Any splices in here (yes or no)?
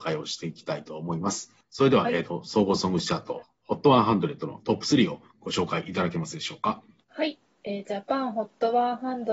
no